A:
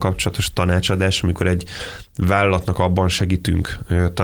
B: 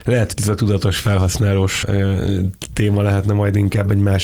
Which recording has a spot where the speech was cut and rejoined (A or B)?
B